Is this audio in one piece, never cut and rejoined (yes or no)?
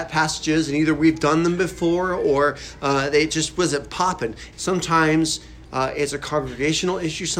no